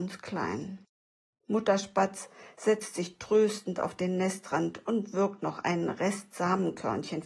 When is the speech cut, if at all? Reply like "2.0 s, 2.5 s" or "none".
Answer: none